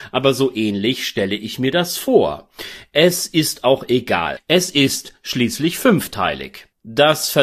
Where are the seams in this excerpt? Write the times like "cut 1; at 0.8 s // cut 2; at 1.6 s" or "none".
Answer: cut 1; at 4.4 s